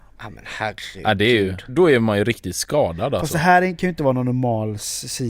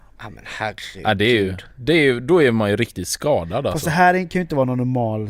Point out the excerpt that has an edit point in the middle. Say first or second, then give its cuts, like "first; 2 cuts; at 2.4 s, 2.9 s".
first; 1 cut; at 1.7 s